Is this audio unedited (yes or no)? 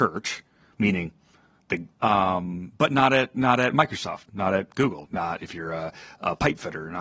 no